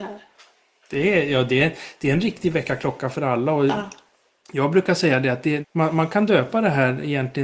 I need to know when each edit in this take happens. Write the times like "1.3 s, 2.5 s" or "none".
5.6 s